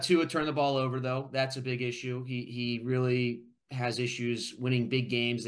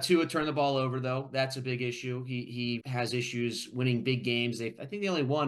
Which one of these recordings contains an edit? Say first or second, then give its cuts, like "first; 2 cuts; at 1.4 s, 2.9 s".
second; 1 cut; at 2.8 s